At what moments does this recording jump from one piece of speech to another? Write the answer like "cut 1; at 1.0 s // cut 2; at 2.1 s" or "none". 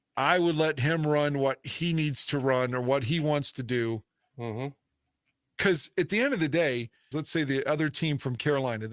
cut 1; at 7.1 s